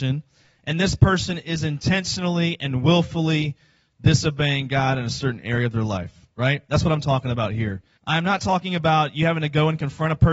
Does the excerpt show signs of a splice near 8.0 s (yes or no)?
yes